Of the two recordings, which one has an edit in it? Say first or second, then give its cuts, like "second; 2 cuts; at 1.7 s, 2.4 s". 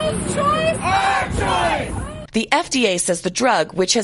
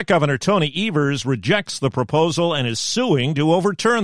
first; 1 cut; at 2.3 s